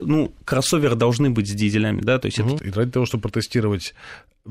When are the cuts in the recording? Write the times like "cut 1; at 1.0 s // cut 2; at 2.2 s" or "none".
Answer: cut 1; at 2.6 s

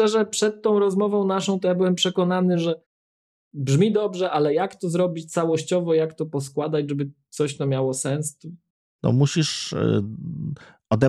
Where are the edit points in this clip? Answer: cut 1; at 8.9 s

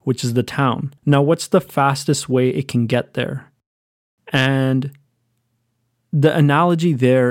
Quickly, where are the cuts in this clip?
cut 1; at 1.0 s // cut 2; at 4.2 s

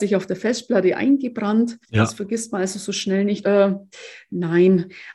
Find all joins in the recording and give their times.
cut 1; at 1.8 s // cut 2; at 3.4 s

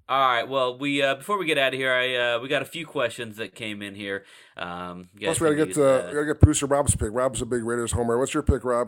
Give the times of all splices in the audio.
none

